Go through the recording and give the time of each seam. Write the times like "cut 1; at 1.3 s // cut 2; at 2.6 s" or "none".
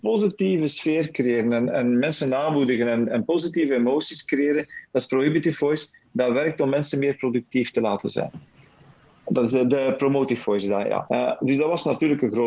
cut 1; at 11.1 s